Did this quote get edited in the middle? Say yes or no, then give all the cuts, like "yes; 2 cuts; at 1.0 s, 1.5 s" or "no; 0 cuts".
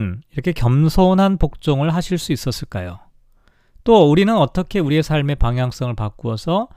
no; 0 cuts